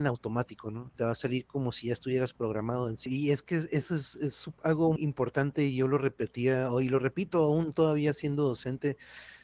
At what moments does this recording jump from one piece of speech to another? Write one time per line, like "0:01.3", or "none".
0:03.1
0:05.0